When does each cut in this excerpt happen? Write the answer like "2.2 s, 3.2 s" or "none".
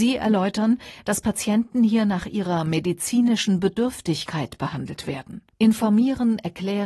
5.5 s